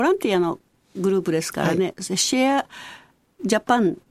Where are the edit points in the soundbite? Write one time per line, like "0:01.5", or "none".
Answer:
none